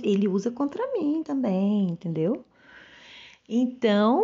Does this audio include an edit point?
no; 0 cuts

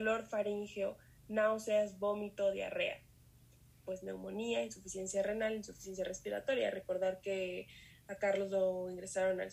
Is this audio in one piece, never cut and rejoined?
no; 1 cut; at 3.8 s

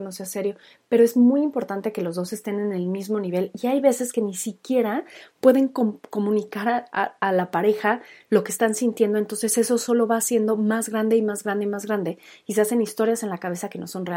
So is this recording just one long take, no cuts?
yes; 0 cuts

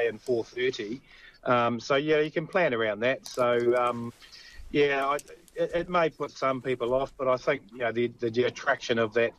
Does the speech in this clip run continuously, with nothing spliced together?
yes; 0 cuts

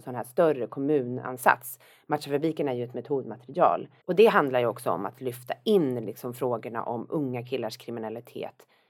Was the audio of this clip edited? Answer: yes; 1 cut; at 4.0 s

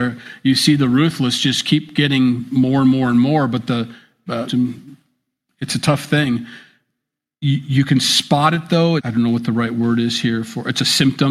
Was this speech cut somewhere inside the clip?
yes; 2 cuts; at 4.5 s, 9.0 s

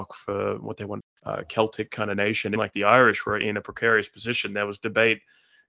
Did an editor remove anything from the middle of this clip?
yes; 2 cuts; at 1.0 s, 2.6 s

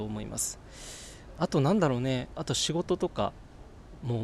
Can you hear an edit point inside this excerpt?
yes; 1 cut; at 1.4 s

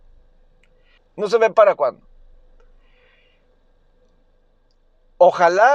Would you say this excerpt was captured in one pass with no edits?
no; 1 cut; at 1.0 s

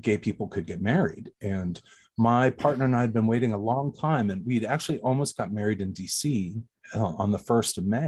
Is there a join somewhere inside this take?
no; 0 cuts

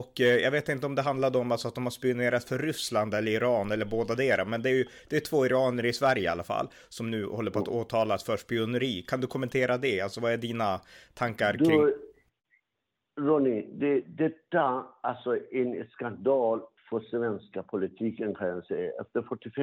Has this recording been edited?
no; 0 cuts

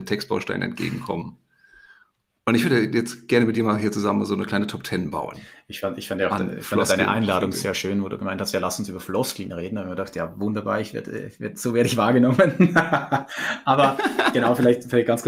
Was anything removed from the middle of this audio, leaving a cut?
no; 0 cuts

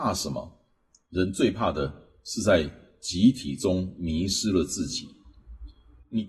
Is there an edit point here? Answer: no; 0 cuts

